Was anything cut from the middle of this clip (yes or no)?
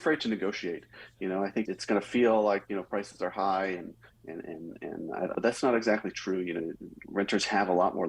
yes